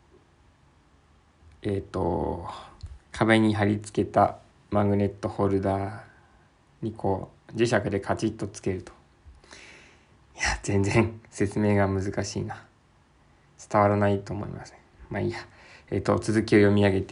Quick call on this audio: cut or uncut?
cut